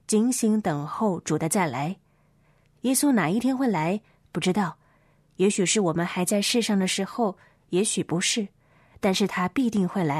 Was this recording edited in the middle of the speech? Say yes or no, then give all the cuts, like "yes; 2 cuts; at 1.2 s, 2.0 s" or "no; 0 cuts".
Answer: no; 0 cuts